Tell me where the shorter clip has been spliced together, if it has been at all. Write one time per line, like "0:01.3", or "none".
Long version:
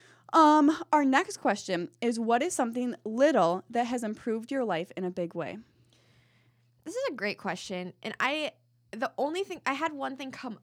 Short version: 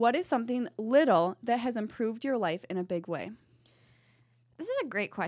none